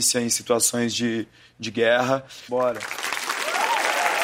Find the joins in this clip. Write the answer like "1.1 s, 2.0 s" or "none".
2.5 s